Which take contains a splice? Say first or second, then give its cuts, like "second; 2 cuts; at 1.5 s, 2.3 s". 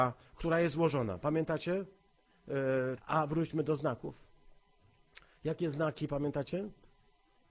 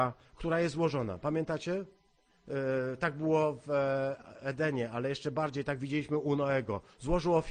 first; 1 cut; at 3.0 s